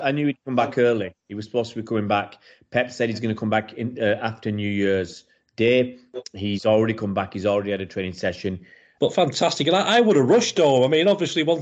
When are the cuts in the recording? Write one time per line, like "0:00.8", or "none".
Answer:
0:09.0